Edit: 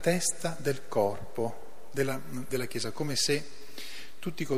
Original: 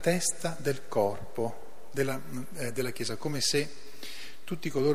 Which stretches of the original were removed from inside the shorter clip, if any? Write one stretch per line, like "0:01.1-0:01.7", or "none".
0:02.5-0:02.7